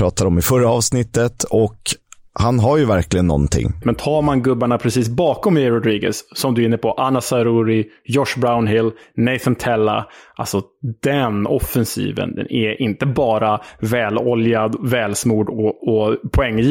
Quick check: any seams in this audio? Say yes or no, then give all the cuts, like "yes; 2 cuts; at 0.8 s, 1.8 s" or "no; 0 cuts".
yes; 2 cuts; at 3.8 s, 15.8 s